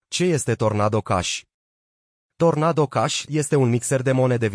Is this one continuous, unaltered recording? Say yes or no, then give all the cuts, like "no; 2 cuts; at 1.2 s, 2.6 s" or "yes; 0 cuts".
no; 1 cut; at 3.3 s